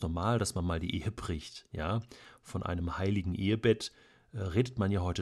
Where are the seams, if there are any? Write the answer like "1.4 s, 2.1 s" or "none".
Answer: none